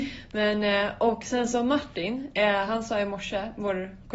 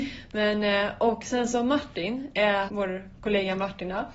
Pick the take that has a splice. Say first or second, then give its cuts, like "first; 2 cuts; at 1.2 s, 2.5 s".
second; 1 cut; at 2.7 s